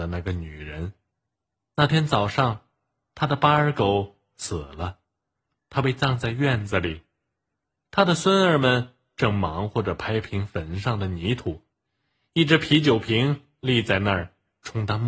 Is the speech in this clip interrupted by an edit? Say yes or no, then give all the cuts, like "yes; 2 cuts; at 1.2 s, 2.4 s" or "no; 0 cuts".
no; 0 cuts